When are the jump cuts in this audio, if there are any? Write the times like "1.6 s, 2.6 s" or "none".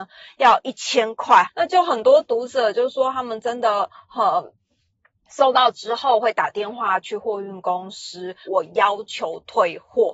1.4 s, 8.5 s